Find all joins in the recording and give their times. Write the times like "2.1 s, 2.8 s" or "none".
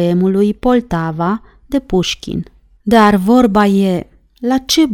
2.8 s